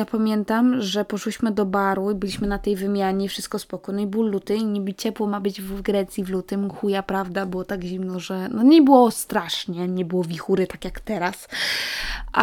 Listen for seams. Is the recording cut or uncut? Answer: uncut